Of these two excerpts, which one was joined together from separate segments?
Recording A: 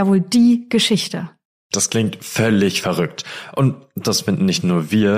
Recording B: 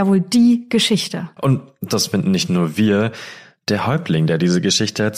B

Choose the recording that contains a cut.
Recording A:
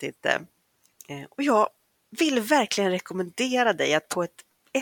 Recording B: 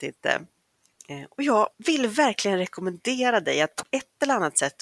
B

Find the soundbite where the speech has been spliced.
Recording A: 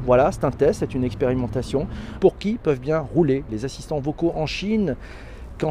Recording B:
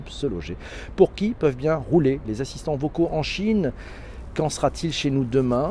A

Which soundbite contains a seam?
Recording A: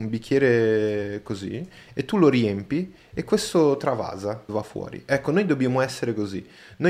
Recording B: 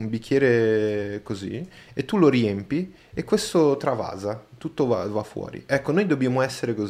A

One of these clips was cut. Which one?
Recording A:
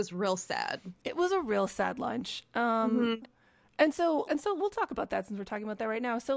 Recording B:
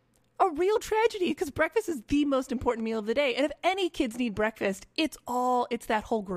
A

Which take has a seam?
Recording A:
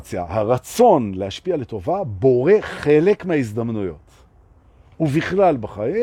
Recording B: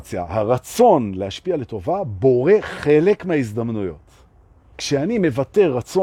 B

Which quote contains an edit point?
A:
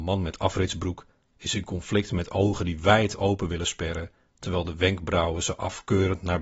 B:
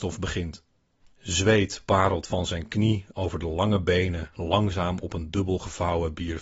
B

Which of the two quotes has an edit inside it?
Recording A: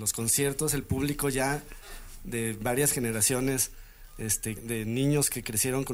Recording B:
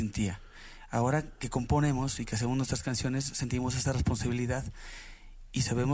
A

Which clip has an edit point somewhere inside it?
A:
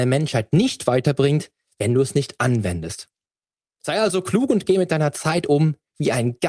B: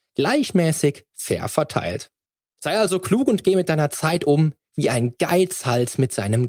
B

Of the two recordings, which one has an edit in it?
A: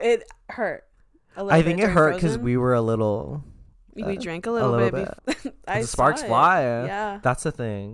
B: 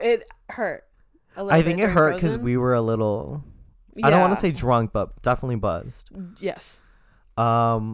A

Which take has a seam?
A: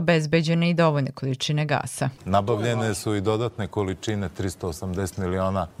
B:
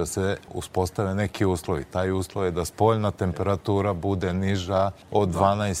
A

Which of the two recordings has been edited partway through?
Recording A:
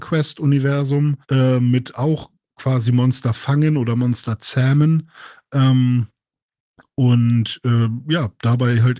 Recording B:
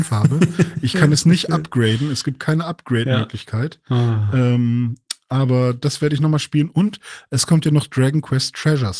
A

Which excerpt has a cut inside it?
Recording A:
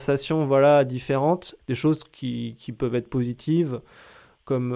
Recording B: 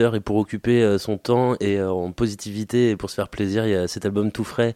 A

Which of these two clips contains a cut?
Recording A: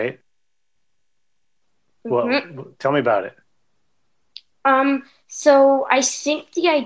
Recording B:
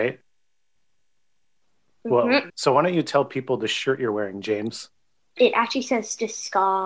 B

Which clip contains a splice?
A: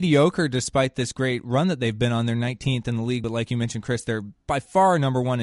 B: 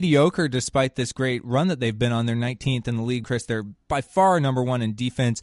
B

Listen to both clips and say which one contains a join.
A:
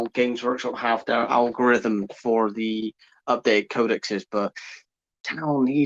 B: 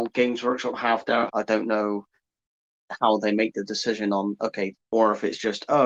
B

